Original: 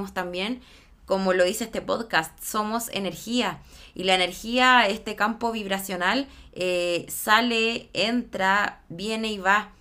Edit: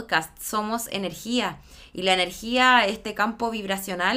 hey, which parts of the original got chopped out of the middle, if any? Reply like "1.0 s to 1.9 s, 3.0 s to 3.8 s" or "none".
none